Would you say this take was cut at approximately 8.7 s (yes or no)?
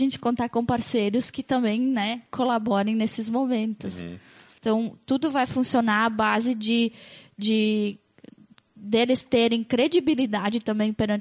no